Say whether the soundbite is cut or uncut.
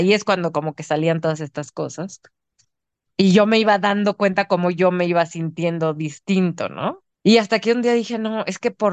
cut